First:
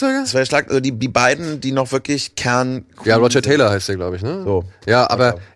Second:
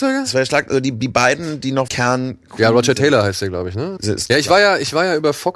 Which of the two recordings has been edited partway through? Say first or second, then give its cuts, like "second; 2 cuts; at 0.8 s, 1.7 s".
second; 2 cuts; at 1.9 s, 4.0 s